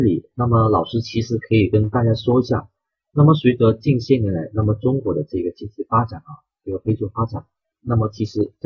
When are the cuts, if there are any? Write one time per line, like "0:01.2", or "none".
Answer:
0:07.7

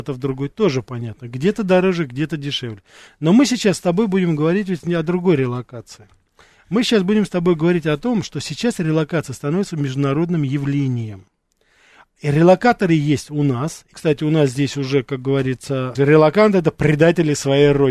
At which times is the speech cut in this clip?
0:13.9
0:15.9

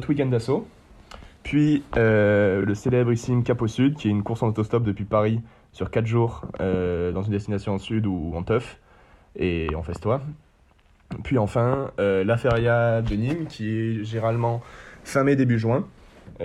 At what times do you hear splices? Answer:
none

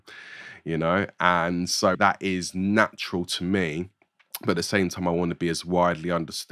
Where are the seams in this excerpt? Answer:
0:01.9

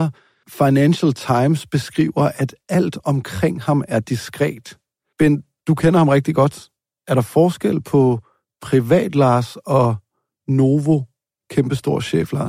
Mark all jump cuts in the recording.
none

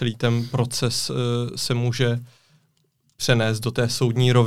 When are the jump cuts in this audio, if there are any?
none

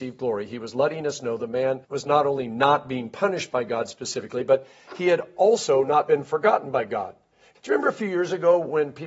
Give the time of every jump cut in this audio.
0:01.8
0:07.6

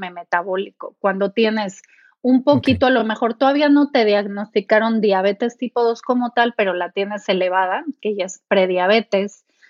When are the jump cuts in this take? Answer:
none

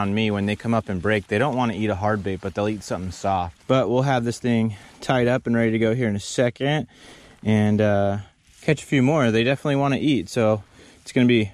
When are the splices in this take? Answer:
0:03.6

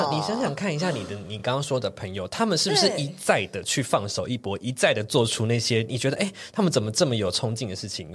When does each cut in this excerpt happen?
none

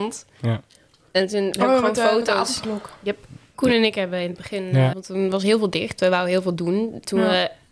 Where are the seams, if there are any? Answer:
0:03.5
0:04.9

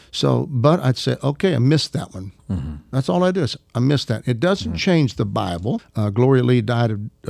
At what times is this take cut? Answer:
0:05.8

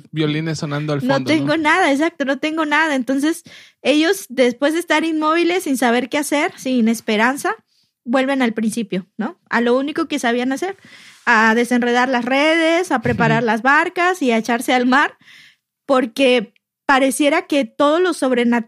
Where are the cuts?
none

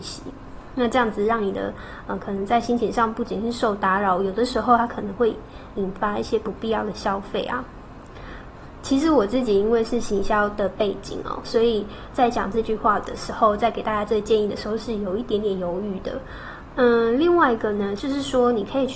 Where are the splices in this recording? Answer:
0:08.8
0:16.7
0:18.0

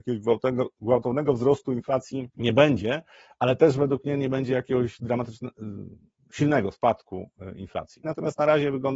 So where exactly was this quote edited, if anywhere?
0:02.3
0:08.0

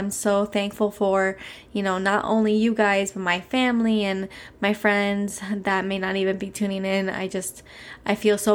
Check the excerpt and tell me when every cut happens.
none

